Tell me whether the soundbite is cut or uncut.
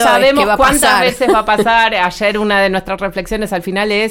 uncut